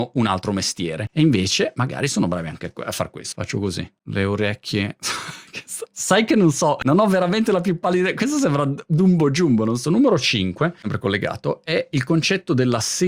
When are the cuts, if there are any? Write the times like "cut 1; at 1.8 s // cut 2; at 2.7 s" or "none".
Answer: cut 1; at 3.3 s // cut 2; at 9.8 s